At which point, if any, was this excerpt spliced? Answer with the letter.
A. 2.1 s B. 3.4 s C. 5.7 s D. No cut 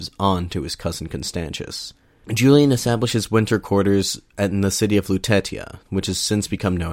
D